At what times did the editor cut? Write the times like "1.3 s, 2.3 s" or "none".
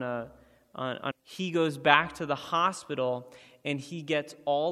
1.1 s

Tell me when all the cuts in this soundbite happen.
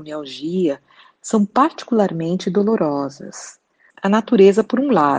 3.9 s

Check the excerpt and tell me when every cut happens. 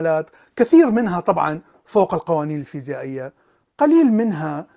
none

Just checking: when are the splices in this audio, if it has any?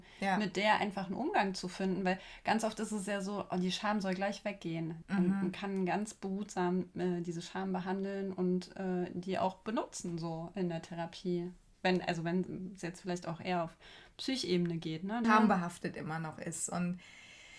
5.0 s, 15.2 s

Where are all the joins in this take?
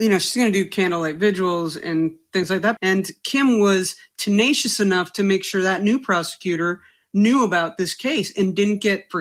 2.8 s

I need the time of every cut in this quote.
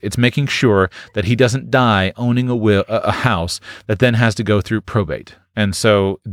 none

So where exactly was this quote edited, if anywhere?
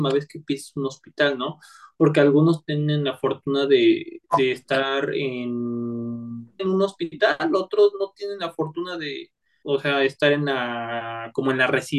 6.6 s, 9.6 s

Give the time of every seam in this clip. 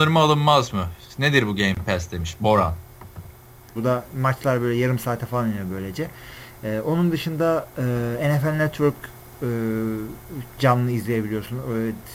3.8 s

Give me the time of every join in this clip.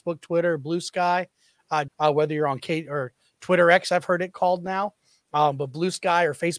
1.9 s

